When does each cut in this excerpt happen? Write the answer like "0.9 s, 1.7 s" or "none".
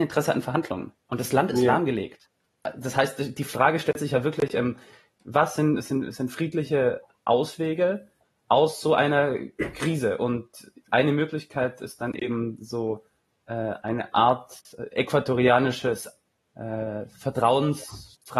1.0 s